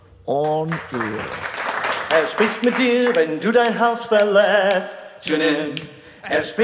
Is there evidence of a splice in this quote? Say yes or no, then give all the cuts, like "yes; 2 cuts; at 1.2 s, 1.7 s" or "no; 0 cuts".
no; 0 cuts